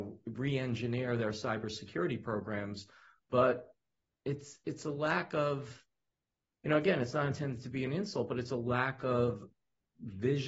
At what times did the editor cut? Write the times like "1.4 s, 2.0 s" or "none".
none